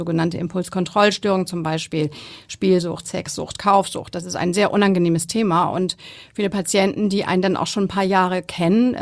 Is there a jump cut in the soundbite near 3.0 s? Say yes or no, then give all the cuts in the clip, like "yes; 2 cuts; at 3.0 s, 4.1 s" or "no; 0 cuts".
no; 0 cuts